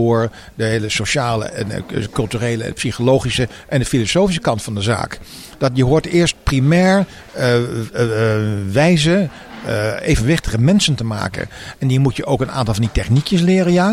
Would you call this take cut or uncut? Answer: uncut